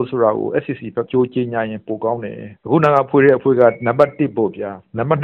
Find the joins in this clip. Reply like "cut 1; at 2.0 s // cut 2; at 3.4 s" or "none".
cut 1; at 1.1 s // cut 2; at 2.6 s